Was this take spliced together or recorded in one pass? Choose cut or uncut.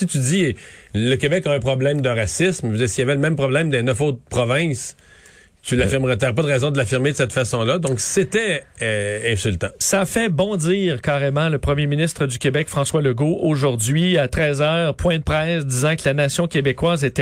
uncut